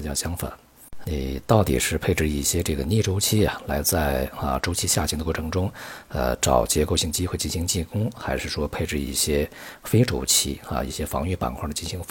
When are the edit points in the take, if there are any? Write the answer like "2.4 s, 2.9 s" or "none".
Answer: 1.0 s